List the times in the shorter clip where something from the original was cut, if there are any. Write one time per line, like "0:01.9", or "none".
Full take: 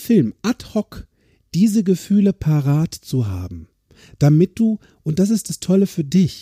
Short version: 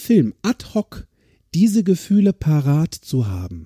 none

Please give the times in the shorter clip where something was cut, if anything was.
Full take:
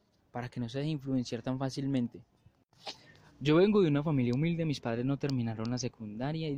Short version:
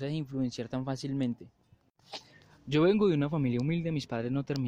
none

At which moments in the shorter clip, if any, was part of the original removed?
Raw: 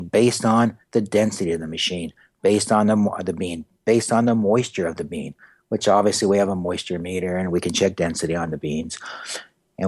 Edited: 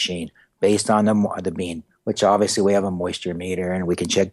0:01.9

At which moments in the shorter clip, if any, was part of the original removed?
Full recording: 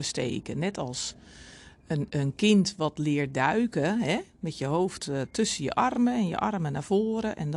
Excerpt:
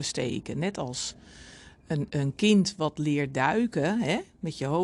none

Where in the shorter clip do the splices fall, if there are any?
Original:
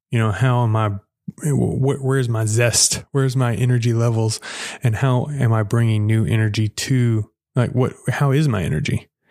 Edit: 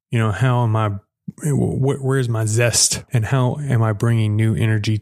0:03.1

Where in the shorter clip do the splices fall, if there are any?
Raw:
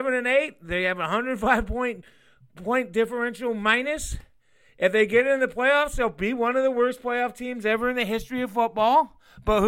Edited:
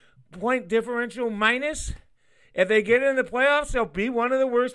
none

